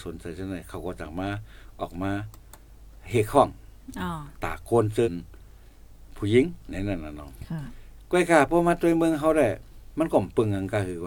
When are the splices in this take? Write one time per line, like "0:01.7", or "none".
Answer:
0:05.0